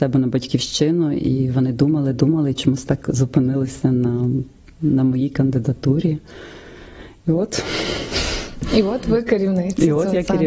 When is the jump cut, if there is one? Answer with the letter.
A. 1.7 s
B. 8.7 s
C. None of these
C